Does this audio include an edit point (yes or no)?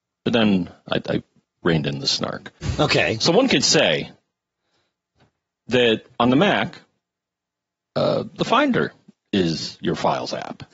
no